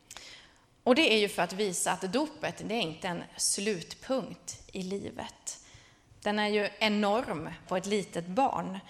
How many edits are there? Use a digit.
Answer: 2